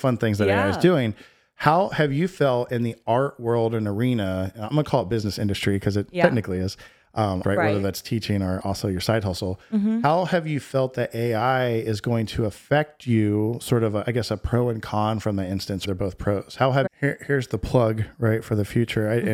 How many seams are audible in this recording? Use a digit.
3